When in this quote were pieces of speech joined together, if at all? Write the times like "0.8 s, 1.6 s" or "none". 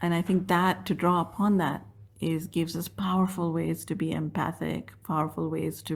none